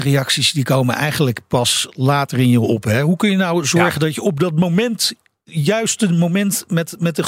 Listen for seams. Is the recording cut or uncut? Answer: uncut